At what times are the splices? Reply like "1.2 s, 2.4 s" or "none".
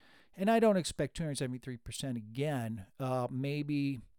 none

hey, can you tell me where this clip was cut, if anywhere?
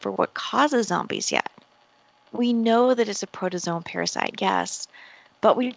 none

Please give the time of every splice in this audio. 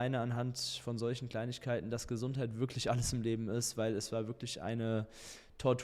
none

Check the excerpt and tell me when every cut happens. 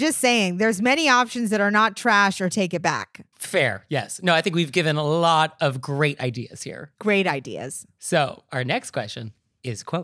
none

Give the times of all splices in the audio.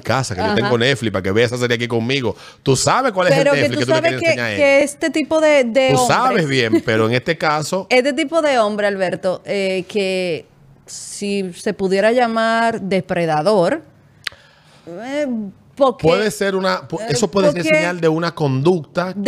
none

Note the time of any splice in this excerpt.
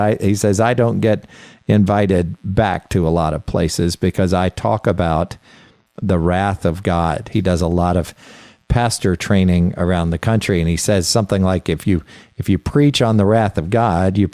7.3 s

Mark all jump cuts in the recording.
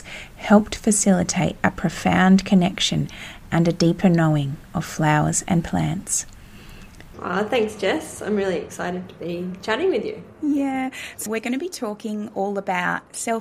7.1 s, 11.3 s

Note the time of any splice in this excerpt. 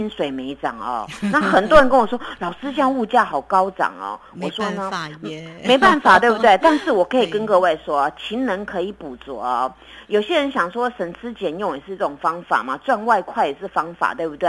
none

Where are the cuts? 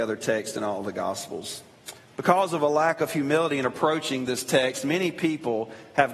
2.0 s

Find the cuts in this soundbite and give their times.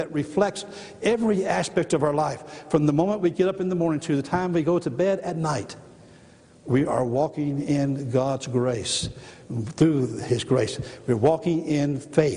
none

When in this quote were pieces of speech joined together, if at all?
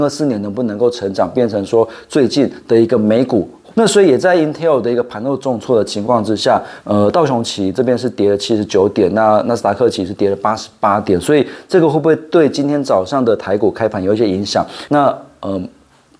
3.7 s, 6.8 s, 14.9 s

